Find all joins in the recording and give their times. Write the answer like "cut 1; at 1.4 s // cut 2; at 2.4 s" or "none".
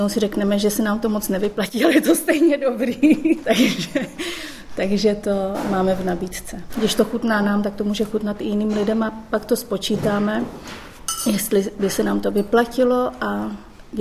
cut 1; at 6.7 s